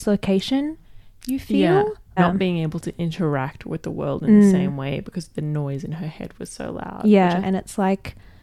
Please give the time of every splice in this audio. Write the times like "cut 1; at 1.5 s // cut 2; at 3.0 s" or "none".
cut 1; at 2.2 s // cut 2; at 7.4 s